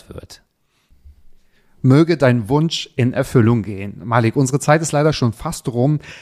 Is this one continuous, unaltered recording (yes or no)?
yes